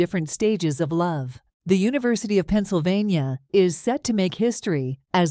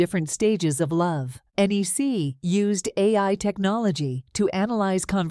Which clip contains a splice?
first; 1 cut; at 1.5 s

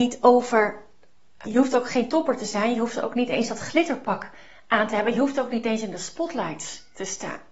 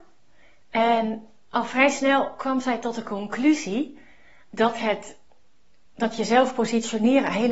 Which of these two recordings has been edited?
first; 1 cut; at 1.5 s

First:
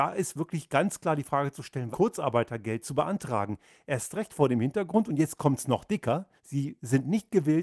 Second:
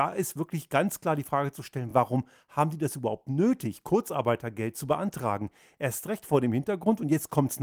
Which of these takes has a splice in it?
first; 2 cuts; at 1.9 s, 6.4 s

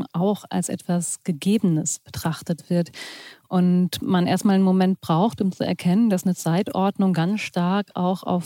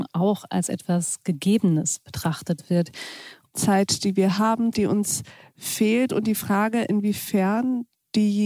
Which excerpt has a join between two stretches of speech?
second; 2 cuts; at 3.5 s, 4.7 s

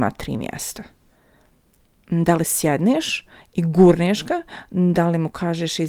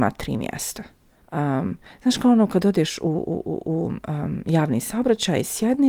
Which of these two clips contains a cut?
second; 1 cut; at 1.2 s

